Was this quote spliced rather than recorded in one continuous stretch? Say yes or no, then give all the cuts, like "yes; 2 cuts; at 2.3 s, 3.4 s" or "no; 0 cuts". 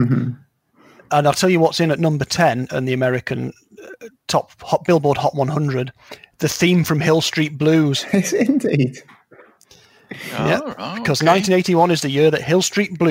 no; 0 cuts